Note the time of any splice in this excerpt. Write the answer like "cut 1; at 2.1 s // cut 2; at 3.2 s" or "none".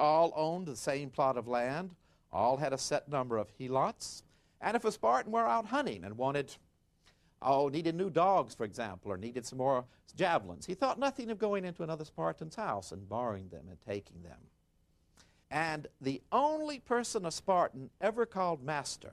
cut 1; at 15.4 s